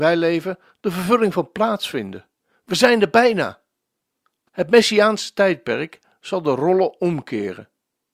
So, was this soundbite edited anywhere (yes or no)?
yes